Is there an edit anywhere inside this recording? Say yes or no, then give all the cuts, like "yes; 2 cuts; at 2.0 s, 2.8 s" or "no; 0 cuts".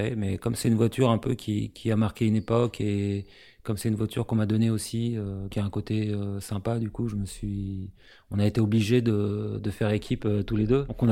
yes; 1 cut; at 5.5 s